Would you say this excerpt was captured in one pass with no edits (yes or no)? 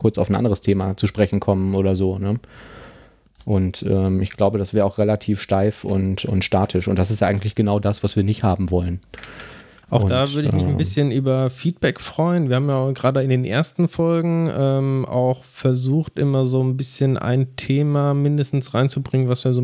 yes